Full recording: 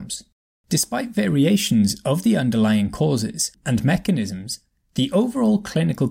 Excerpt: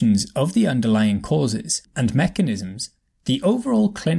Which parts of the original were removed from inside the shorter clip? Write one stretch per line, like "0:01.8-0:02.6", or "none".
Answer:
none